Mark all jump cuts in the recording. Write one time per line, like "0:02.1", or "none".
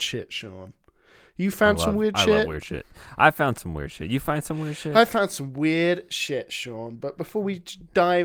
none